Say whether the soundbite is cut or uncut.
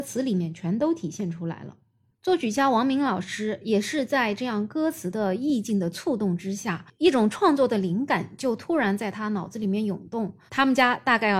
cut